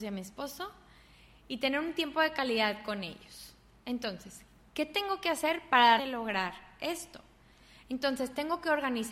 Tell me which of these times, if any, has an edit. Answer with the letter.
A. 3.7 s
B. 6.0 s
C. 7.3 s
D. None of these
B